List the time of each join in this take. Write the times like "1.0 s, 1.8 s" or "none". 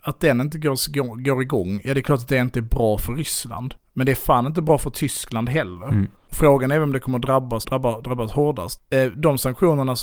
7.6 s

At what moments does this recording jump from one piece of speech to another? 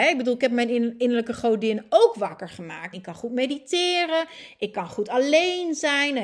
2.9 s

